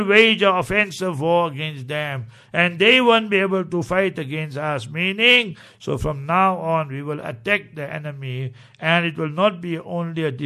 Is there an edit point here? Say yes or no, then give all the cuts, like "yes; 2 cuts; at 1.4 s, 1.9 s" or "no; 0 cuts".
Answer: no; 0 cuts